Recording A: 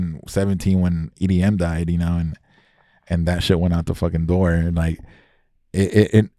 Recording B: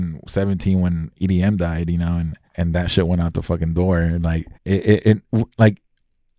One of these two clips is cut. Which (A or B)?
B